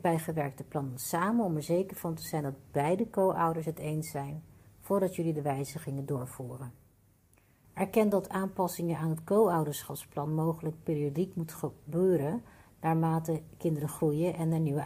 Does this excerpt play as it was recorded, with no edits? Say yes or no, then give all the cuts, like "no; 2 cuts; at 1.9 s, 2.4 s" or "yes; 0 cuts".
no; 1 cut; at 7.6 s